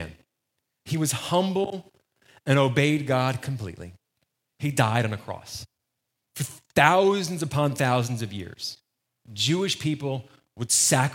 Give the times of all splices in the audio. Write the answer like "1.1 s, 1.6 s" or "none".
4.5 s, 6.3 s